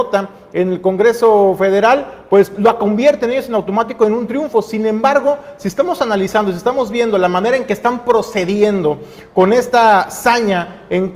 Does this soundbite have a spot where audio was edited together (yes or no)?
no